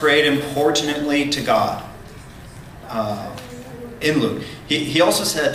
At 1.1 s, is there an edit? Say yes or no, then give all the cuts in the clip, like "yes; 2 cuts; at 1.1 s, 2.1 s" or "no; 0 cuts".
no; 2 cuts; at 2.8 s, 4.0 s